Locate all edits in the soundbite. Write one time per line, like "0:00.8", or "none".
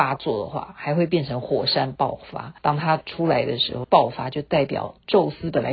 0:02.6
0:03.8